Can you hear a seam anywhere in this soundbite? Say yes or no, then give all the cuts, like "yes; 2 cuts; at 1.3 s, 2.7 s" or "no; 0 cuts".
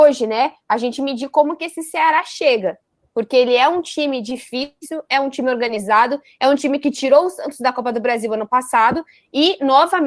no; 0 cuts